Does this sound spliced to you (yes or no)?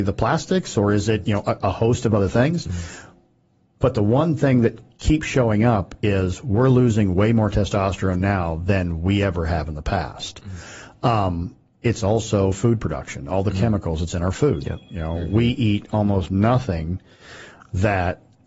yes